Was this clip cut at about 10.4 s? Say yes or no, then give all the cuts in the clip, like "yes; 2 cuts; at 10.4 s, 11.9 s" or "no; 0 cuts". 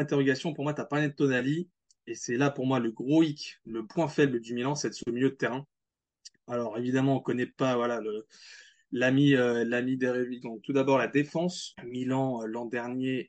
yes; 2 cuts; at 10.4 s, 11.7 s